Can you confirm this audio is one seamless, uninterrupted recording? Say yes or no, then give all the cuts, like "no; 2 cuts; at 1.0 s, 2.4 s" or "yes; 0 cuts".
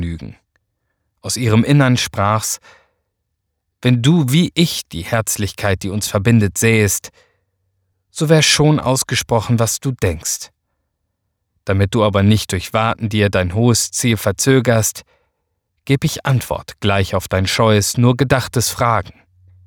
yes; 0 cuts